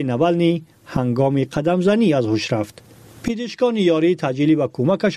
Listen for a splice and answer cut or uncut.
uncut